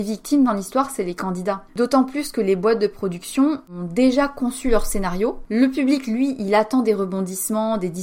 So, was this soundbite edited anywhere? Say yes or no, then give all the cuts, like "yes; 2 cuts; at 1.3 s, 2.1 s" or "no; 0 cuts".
no; 0 cuts